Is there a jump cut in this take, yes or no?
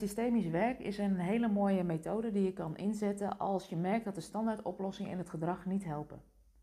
no